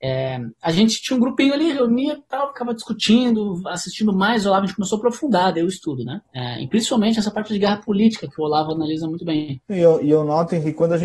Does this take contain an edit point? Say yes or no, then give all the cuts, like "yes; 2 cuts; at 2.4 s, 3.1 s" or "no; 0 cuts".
no; 0 cuts